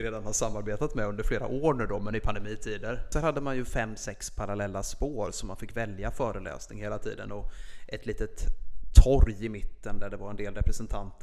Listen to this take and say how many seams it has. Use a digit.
1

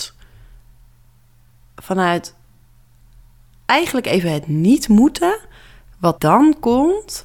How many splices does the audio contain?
1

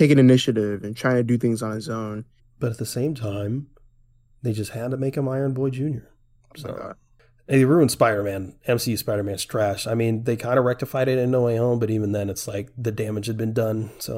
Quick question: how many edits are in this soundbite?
1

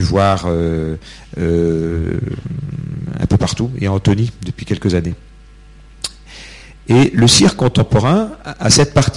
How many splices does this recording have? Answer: 0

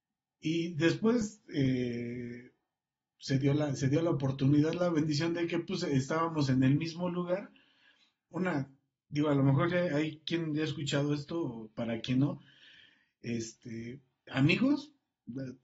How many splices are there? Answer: 2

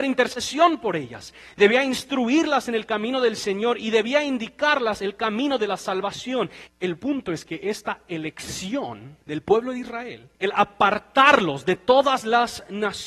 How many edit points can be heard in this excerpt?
3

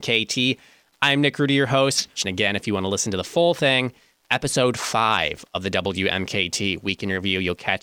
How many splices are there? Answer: 2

